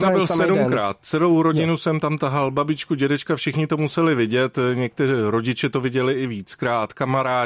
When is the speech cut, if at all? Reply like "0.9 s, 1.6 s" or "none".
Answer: none